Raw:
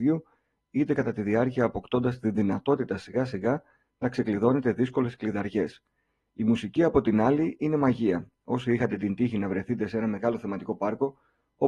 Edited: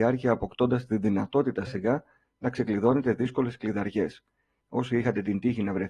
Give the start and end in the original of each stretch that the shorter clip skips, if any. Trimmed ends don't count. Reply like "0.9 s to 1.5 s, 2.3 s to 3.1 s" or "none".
3.0 s to 3.3 s, 6.2 s to 8.4 s

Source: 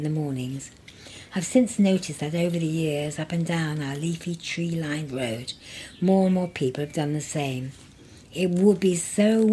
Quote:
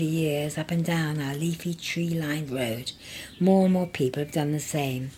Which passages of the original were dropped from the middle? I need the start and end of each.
none

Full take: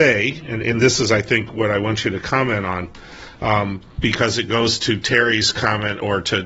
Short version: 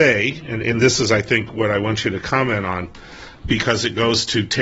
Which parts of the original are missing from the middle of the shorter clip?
3.4 s to 3.9 s

